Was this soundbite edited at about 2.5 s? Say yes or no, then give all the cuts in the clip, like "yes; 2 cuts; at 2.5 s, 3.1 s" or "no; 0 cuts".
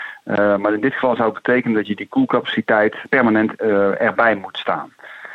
no; 0 cuts